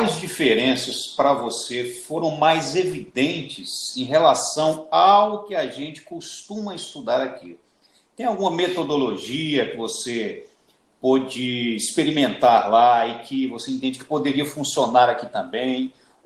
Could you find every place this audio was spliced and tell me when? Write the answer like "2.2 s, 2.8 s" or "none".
none